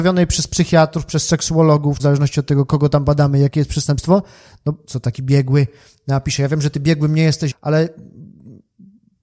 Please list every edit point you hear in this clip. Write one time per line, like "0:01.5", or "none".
0:02.0
0:04.9
0:07.5